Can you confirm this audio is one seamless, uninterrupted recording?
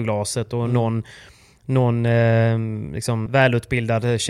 no; 1 cut; at 3.3 s

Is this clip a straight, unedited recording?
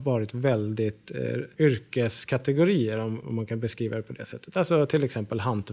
no; 2 cuts; at 1.6 s, 3.2 s

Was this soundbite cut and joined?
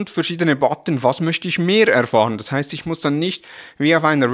no; 0 cuts

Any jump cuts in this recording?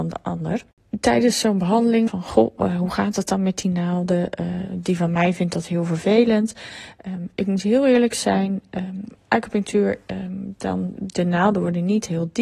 yes; 1 cut; at 2.1 s

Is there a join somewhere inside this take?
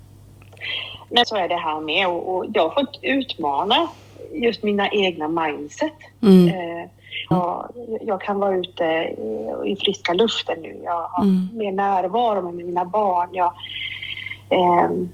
yes; 2 cuts; at 1.2 s, 7.3 s

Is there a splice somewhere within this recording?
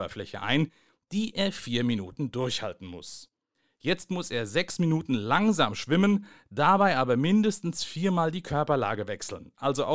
no; 0 cuts

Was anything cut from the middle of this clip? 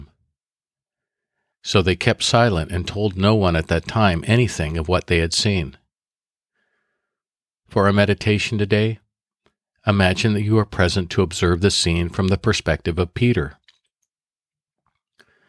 yes; 1 cut; at 1.5 s

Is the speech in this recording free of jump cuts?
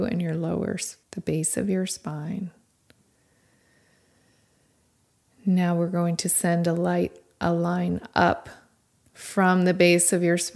no; 1 cut; at 1.0 s

